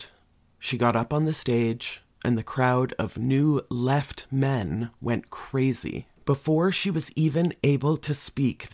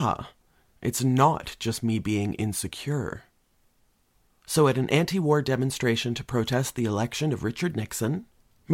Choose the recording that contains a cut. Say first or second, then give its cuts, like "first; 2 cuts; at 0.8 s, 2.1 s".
first; 1 cut; at 6.2 s